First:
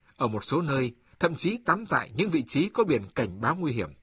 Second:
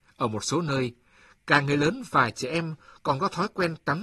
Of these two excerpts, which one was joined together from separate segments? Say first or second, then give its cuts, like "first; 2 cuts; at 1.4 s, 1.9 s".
first; 1 cut; at 1.1 s